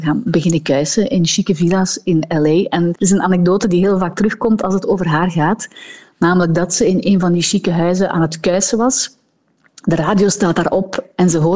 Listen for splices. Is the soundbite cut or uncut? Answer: cut